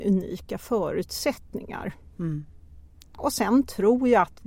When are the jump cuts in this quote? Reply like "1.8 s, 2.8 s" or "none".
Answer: 3.2 s